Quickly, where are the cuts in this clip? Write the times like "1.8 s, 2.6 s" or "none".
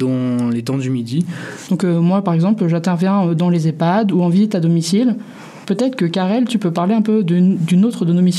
1.6 s, 5.6 s